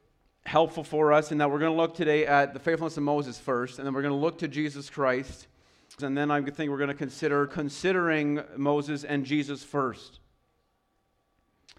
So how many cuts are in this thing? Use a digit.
2